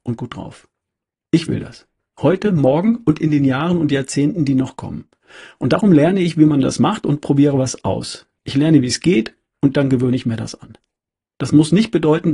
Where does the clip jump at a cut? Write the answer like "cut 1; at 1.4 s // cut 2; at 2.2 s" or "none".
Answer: none